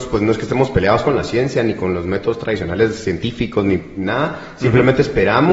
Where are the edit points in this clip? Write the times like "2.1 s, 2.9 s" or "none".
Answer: none